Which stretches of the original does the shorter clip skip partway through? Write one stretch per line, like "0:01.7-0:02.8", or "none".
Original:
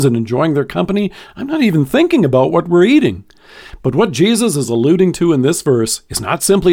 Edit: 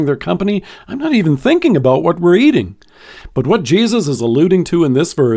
none